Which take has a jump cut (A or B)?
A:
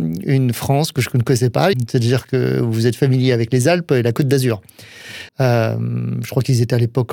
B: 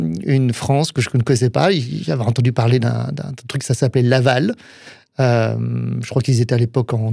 A